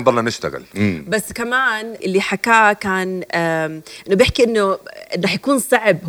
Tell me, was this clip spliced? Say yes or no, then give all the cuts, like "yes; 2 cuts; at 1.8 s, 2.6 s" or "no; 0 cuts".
yes; 1 cut; at 2.0 s